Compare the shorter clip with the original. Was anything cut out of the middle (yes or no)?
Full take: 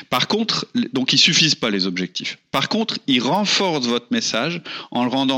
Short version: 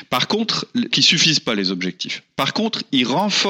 yes